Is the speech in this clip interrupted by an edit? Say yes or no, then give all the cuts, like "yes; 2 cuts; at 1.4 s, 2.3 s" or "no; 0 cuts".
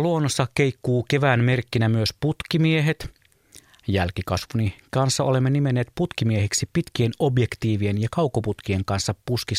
no; 0 cuts